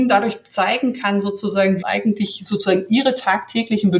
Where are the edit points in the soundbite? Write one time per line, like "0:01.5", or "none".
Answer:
0:01.8